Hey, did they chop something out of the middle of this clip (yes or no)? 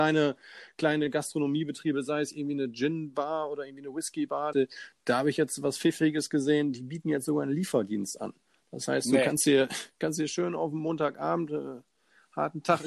yes